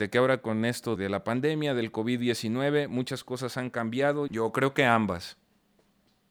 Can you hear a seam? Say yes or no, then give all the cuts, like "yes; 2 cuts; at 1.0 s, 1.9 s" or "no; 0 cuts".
yes; 2 cuts; at 1.0 s, 4.3 s